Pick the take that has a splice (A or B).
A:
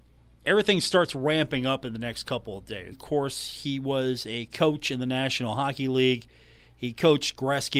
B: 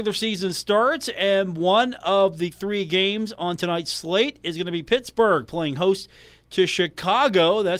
A